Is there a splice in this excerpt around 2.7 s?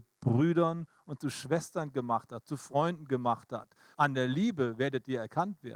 no; 1 cut; at 3.9 s

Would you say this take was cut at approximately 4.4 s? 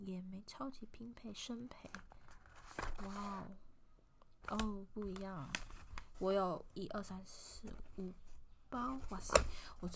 yes; 2 cuts; at 4.4 s, 6.1 s

